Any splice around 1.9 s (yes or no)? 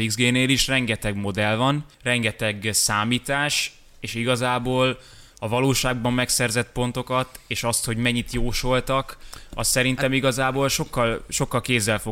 yes